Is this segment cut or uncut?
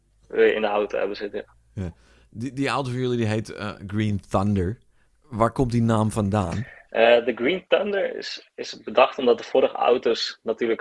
uncut